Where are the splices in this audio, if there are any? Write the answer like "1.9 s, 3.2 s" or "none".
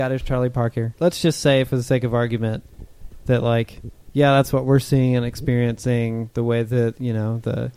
1.0 s